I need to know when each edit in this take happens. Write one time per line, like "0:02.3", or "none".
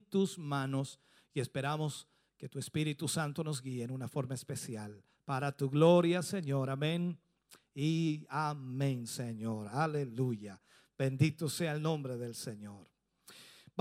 none